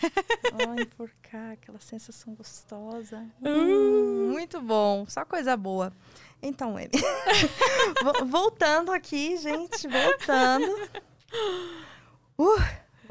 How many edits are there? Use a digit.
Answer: 0